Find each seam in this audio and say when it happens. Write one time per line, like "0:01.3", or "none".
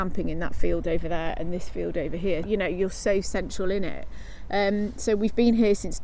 0:02.4